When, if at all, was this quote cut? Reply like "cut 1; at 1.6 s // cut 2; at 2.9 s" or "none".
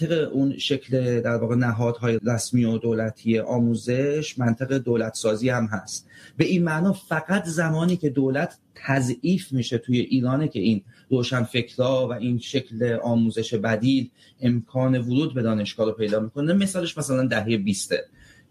cut 1; at 2.2 s

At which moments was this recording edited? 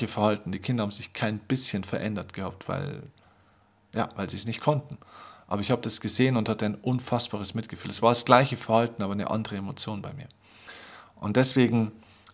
none

